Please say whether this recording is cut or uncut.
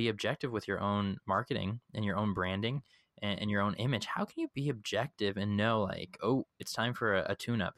uncut